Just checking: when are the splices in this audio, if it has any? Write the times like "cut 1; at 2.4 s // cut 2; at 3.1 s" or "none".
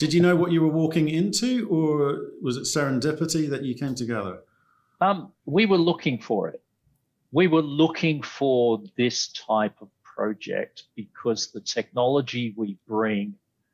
none